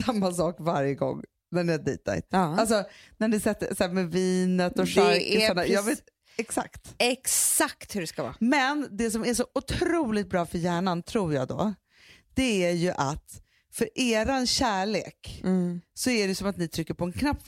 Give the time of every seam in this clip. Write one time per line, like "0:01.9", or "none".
none